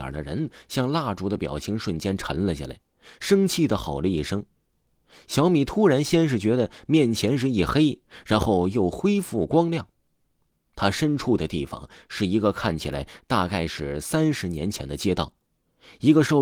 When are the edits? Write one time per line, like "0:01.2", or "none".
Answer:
0:10.7